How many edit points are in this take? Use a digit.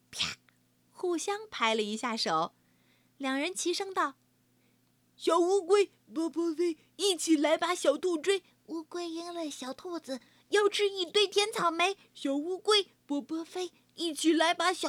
0